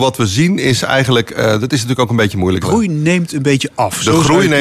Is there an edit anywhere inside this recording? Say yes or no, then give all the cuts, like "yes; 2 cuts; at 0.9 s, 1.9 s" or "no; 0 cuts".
yes; 1 cut; at 2.6 s